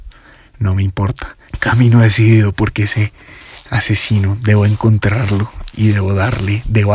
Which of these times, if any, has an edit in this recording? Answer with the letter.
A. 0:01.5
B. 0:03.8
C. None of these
A